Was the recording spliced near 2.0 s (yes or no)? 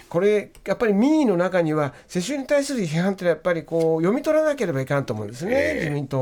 no